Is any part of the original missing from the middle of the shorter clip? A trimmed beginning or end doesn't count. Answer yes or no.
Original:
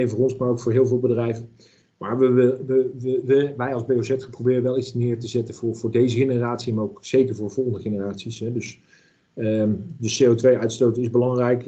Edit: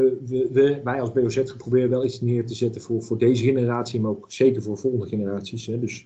no